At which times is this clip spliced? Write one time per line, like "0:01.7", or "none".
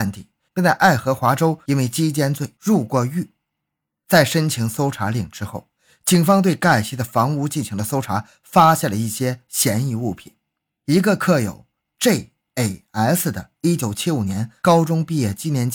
none

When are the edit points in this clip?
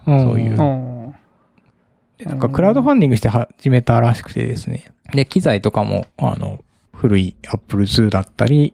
0:06.9

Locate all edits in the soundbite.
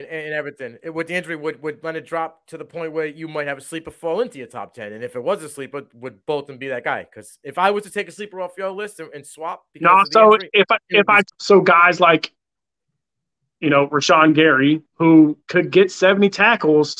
0:11.3

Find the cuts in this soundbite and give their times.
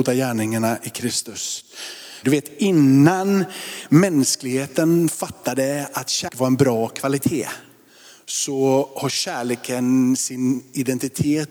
0:02.2

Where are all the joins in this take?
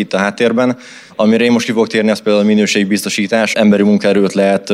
0:01.1
0:03.5

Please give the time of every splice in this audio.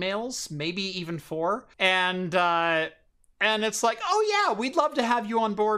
0:01.7

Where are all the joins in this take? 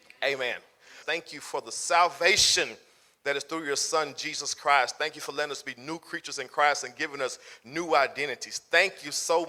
0:01.0

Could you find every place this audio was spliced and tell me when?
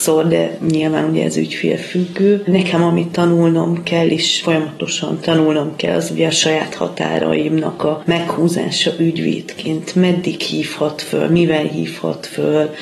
none

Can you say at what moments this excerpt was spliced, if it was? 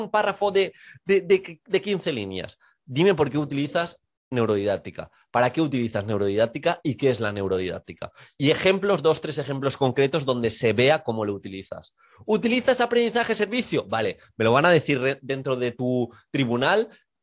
none

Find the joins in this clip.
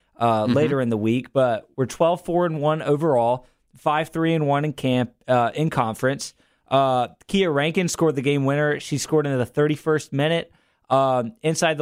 none

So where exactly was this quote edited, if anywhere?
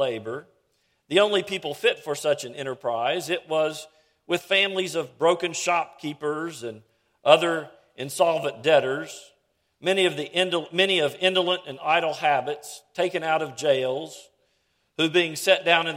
none

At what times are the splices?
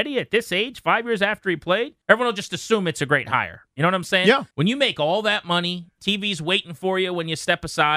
0:02.0
0:04.5
0:06.0

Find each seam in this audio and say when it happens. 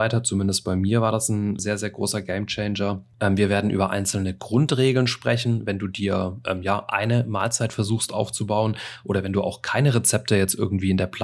0:01.6

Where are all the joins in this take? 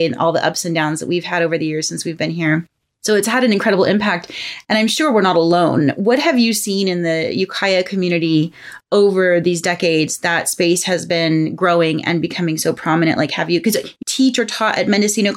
0:14.0

